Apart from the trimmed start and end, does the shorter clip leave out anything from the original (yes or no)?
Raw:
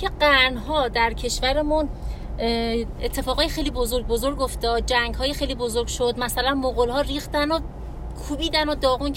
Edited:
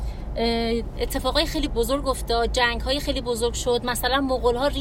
yes